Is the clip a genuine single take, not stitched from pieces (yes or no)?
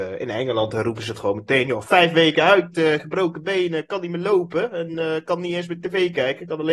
yes